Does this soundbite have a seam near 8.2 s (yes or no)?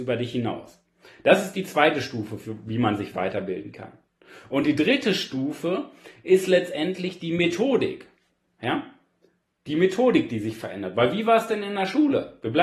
no